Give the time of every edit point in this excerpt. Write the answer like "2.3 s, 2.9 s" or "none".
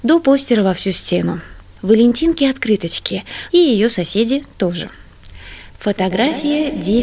1.8 s, 3.5 s